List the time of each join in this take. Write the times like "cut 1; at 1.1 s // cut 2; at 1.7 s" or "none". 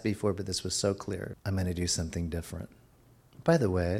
cut 1; at 1.3 s